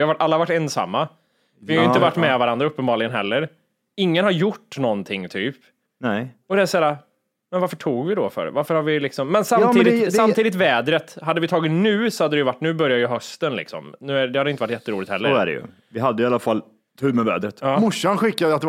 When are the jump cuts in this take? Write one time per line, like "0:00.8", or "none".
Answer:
none

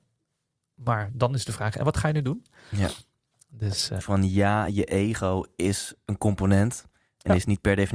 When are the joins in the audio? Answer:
0:04.0

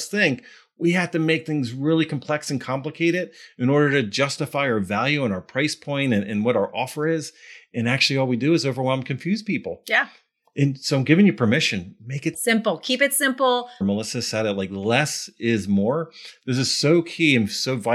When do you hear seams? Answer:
0:12.3
0:13.8

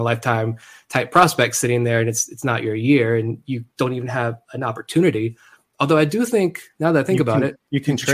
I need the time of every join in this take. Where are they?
none

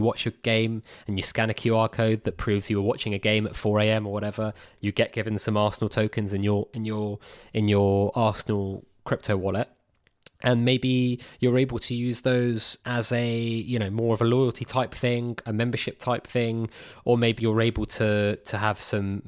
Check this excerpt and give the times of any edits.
0:12.8
0:17.4

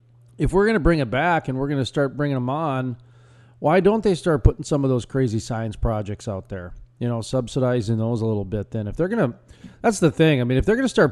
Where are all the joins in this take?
none

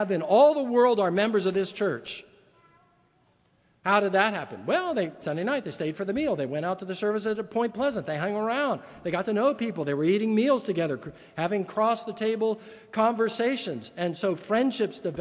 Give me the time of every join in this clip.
0:05.2

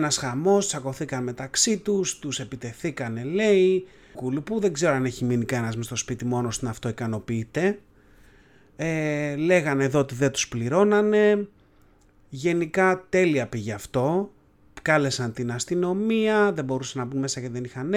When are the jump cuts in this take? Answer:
0:04.1

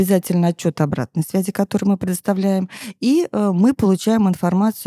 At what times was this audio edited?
none

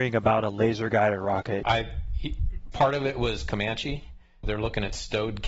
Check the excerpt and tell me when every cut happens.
0:01.6
0:04.4

